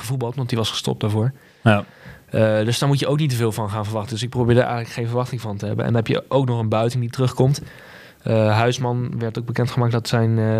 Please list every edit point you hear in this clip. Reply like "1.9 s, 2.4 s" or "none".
none

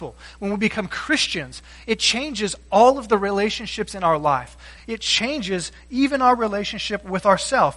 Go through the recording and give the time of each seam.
4.8 s

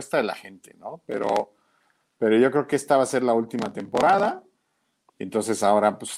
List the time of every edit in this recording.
5.1 s

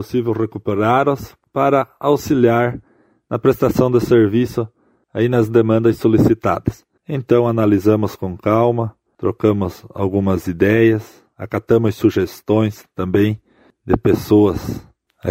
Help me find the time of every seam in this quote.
7.0 s

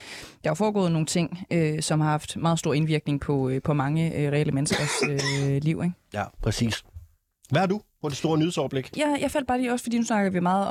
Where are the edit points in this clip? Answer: 8.9 s

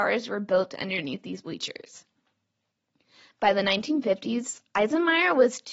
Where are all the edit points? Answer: none

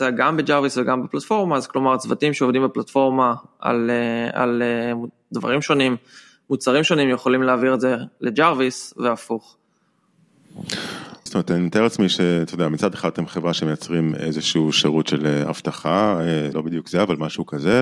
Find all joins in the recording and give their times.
11.3 s, 16.5 s

